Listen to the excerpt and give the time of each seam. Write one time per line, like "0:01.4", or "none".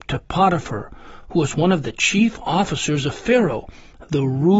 none